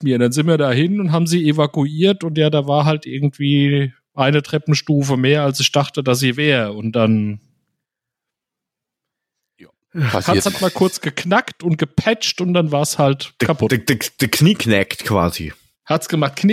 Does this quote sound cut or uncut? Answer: uncut